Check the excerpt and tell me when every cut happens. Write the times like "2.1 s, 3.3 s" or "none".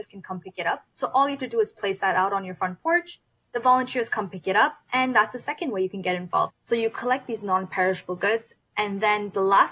6.5 s